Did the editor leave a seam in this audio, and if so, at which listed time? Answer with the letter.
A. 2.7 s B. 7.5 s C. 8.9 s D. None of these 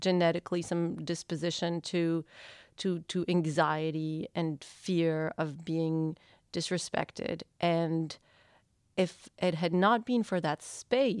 D